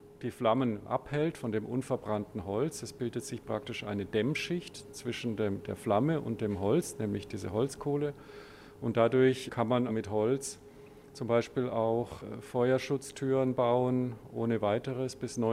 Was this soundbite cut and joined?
yes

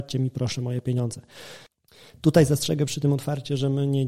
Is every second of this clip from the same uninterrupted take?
yes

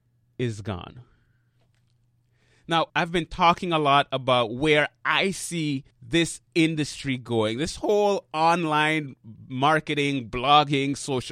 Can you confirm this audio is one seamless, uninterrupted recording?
no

